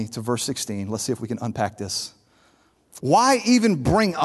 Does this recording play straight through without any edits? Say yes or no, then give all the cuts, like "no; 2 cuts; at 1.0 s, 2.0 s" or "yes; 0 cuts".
no; 1 cut; at 3.0 s